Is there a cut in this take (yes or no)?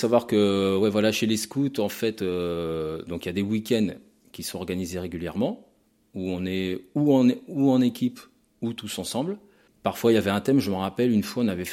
no